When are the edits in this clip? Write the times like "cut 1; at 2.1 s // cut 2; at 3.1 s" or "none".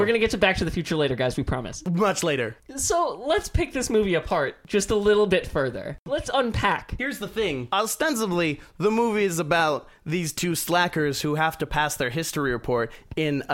none